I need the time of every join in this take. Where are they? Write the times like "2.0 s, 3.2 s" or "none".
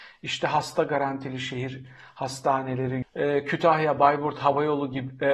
3.0 s